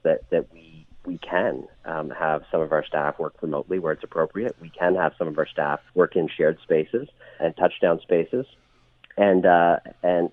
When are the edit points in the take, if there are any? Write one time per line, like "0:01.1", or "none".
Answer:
0:05.9
0:07.4